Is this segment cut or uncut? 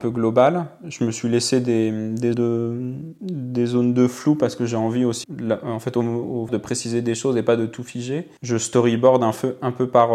cut